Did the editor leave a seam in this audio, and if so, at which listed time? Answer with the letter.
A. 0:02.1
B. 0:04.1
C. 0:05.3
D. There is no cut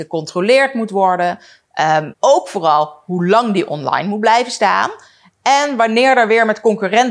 A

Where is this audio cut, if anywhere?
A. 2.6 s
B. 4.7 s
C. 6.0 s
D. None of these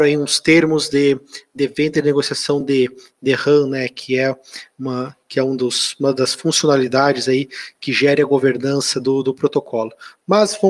D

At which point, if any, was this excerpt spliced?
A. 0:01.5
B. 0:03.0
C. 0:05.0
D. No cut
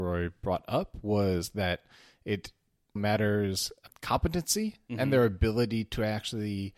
B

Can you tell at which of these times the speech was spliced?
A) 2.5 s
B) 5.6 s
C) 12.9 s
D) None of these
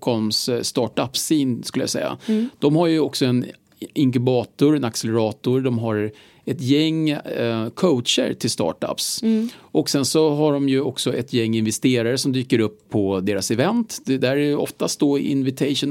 C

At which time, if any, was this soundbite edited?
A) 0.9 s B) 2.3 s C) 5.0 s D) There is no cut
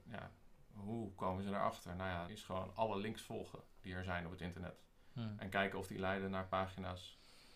B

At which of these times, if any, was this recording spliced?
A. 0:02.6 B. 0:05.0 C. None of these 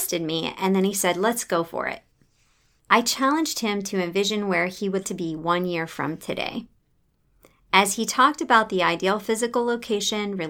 B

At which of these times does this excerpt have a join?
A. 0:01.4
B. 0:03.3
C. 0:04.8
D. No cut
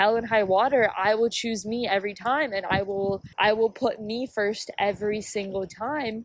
B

